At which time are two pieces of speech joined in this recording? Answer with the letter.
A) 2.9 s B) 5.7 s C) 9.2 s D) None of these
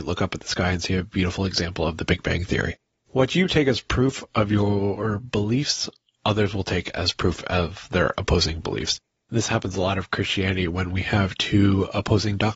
D